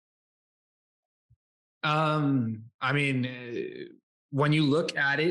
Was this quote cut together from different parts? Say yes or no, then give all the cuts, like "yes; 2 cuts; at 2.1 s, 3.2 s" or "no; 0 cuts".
no; 0 cuts